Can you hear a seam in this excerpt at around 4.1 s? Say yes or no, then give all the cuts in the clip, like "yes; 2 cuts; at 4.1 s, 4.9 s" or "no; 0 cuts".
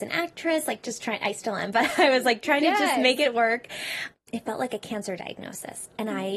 yes; 1 cut; at 4.1 s